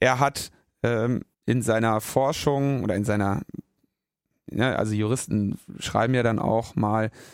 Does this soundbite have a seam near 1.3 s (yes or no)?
yes